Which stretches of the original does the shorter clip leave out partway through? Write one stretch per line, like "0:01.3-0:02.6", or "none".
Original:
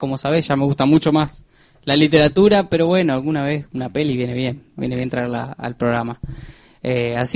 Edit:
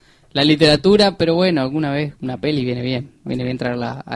none